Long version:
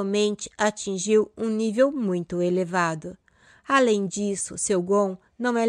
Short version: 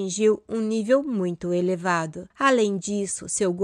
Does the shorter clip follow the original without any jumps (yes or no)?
no